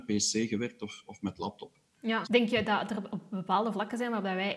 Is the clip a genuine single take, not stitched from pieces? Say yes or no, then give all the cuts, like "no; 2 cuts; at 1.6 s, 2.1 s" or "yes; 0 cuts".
no; 1 cut; at 2.2 s